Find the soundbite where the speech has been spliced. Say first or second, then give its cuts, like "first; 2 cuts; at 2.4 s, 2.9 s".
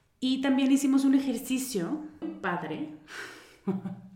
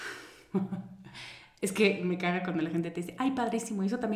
first; 1 cut; at 2.2 s